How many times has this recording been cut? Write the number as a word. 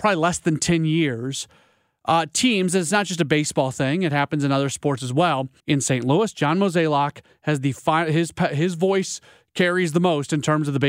one